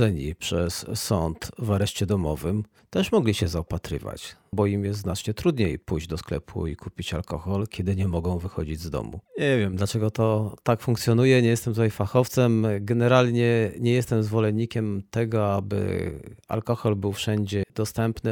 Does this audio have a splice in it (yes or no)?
yes